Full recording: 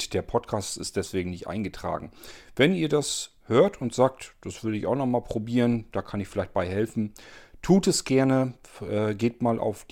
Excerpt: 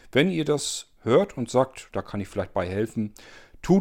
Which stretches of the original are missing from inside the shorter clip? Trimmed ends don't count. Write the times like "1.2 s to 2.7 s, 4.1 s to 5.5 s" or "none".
4.3 s to 5.9 s